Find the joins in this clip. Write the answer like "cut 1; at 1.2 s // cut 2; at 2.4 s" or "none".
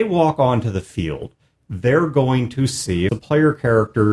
cut 1; at 3.1 s